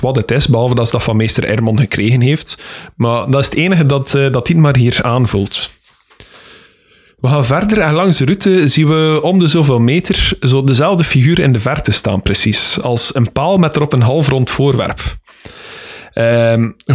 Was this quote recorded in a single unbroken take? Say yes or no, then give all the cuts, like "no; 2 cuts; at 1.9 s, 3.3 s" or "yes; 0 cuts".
yes; 0 cuts